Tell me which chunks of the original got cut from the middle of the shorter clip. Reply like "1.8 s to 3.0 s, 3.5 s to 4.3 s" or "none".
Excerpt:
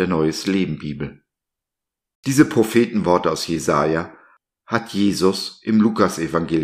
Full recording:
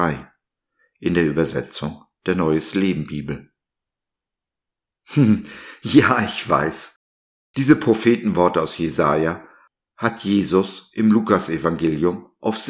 4.4 s to 7.5 s